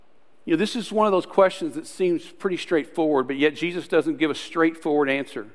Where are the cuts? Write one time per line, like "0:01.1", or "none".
none